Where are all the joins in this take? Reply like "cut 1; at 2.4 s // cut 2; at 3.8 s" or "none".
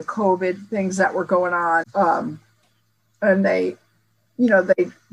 cut 1; at 1.8 s